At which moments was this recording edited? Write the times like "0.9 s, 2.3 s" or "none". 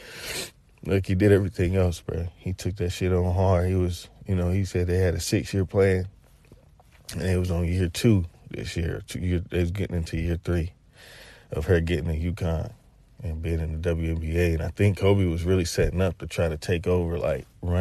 none